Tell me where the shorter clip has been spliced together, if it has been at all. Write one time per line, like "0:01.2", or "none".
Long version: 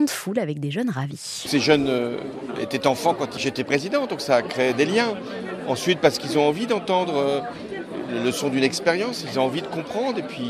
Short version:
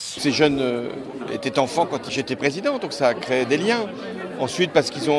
none

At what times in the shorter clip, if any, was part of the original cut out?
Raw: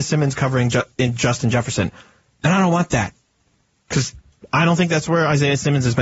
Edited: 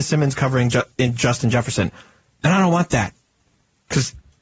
none

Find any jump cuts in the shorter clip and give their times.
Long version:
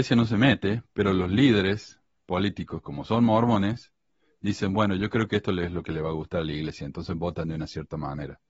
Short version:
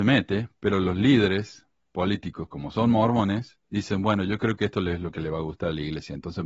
0:03.6

